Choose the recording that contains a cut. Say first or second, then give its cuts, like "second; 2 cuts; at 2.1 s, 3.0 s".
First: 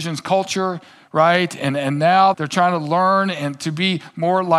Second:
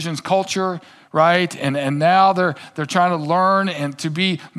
first; 1 cut; at 2.3 s